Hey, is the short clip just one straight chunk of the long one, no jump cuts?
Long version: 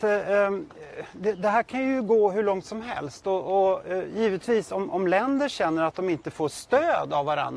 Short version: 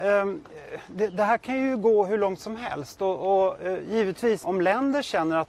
no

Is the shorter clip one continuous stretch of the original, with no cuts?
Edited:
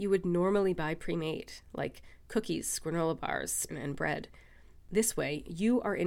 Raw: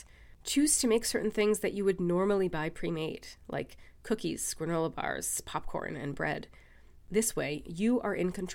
no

